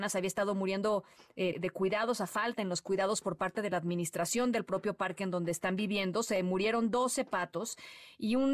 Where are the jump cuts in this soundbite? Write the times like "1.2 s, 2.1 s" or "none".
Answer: 1.5 s